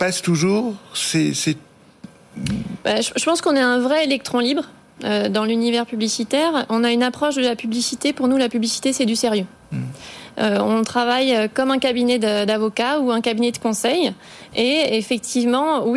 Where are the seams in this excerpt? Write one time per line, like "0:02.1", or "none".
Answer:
none

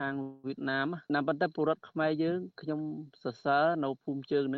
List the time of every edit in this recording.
none

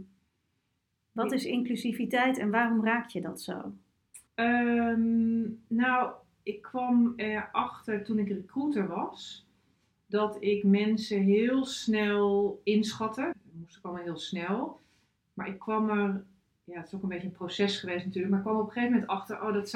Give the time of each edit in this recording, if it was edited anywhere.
0:04.3
0:13.3

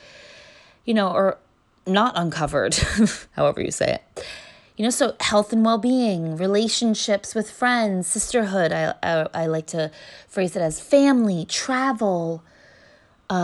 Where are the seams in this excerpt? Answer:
none

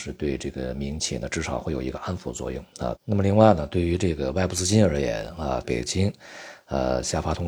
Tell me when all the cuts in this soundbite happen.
0:03.0
0:05.6

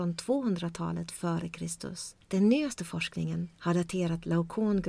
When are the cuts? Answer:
0:02.2

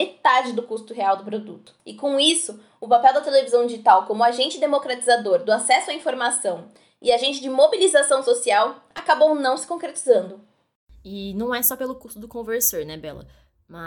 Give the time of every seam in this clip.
0:01.8

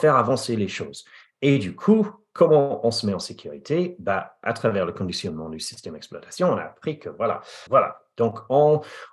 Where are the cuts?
0:07.7

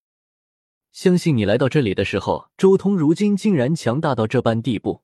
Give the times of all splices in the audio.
0:02.5

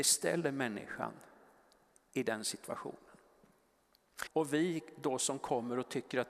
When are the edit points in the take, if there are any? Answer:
0:04.3

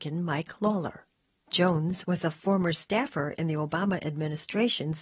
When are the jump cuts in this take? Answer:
0:02.0

